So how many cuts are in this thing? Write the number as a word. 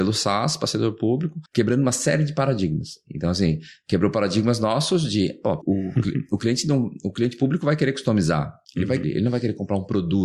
two